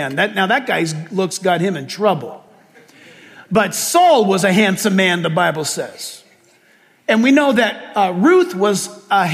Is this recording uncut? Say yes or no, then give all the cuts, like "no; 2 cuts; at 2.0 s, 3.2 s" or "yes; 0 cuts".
yes; 0 cuts